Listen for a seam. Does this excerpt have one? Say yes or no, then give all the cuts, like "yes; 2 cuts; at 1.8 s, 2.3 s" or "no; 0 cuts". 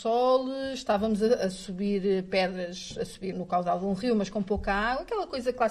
yes; 1 cut; at 3.3 s